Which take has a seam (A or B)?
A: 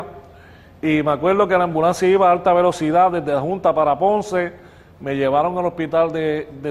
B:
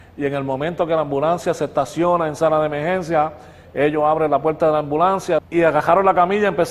B